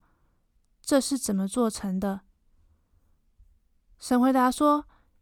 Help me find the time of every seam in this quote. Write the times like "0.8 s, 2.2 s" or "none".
none